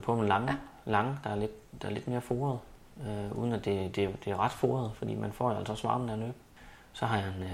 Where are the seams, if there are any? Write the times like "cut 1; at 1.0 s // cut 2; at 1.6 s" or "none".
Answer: none